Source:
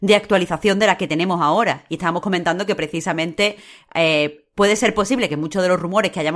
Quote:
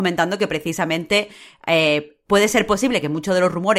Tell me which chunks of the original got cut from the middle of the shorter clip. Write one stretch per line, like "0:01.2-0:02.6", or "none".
none

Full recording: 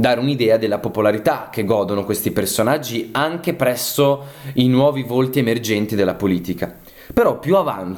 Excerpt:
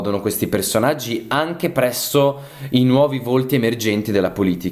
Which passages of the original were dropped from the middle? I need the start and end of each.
none

